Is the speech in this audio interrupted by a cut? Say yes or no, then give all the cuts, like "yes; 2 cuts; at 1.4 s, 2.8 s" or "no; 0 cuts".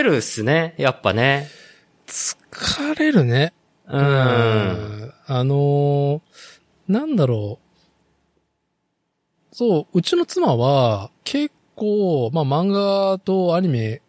yes; 1 cut; at 11.2 s